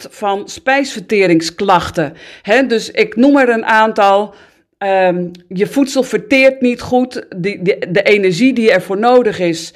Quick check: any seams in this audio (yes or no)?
no